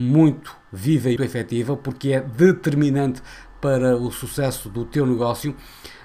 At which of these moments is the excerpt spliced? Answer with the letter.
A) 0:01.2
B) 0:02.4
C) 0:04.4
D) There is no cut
A